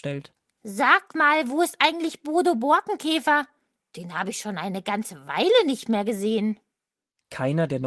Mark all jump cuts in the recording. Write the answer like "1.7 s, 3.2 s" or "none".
none